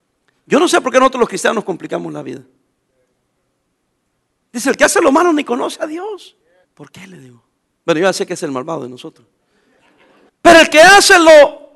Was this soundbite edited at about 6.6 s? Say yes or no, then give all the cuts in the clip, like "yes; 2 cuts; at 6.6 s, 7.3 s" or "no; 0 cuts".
yes; 2 cuts; at 6.6 s, 10.3 s